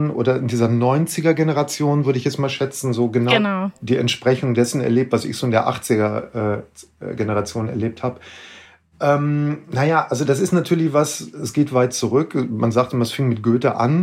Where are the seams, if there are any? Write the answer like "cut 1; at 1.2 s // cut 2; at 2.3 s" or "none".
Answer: none